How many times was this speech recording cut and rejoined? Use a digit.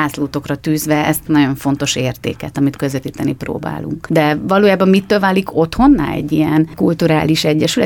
0